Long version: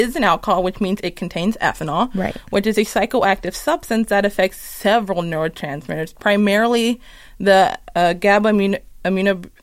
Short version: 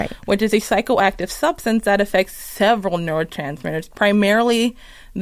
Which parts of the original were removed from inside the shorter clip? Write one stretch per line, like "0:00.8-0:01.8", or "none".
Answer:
none